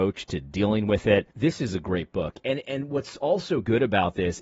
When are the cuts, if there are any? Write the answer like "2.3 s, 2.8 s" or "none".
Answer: 1.3 s